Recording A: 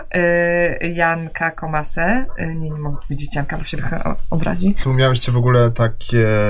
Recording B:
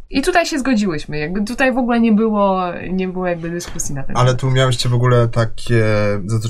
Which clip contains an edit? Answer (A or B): A